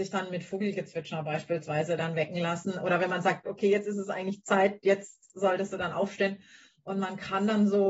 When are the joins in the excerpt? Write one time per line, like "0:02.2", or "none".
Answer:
0:03.5
0:06.7